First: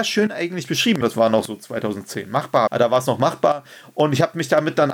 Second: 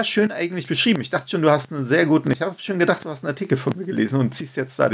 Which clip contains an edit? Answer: first; 2 cuts; at 1.0 s, 2.7 s

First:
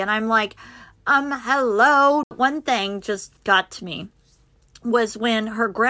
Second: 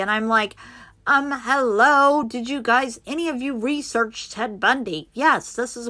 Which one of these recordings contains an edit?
first; 2 cuts; at 2.2 s, 3.4 s

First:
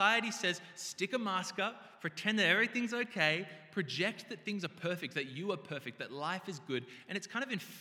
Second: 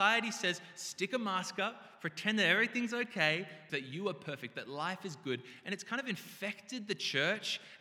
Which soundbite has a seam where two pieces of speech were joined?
second; 1 cut; at 3.7 s

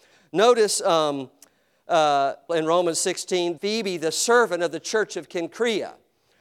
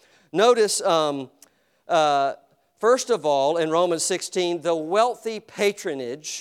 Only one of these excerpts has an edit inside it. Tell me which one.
first; 2 cuts; at 2.5 s, 3.6 s

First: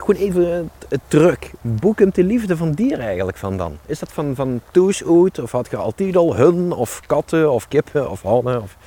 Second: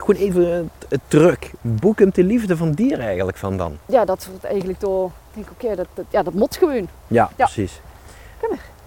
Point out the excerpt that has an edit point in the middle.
second; 2 cuts; at 3.8 s, 7.1 s

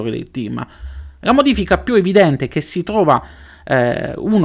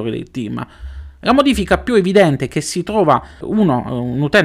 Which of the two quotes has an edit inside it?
second; 1 cut; at 3.4 s

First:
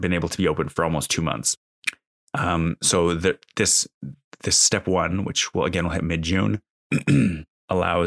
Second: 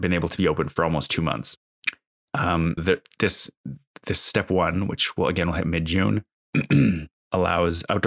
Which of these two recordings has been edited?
second; 1 cut; at 2.8 s

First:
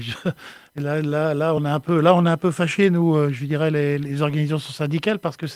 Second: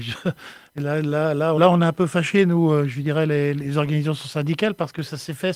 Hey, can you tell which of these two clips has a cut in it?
second; 1 cut; at 1.6 s

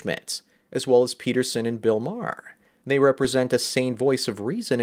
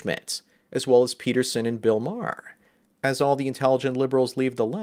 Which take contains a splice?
second; 1 cut; at 2.8 s

